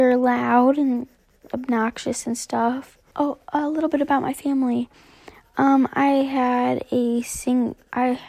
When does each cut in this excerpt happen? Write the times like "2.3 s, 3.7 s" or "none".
3.1 s